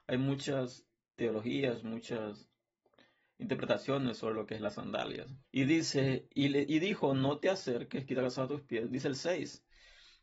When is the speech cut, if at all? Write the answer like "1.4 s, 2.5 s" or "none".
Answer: 5.5 s